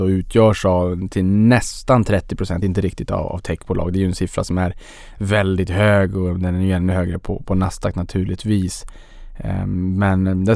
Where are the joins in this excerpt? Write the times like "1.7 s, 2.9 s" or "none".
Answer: none